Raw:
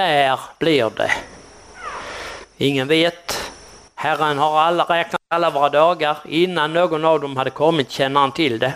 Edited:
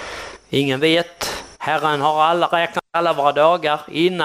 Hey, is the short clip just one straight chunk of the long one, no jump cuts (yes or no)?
no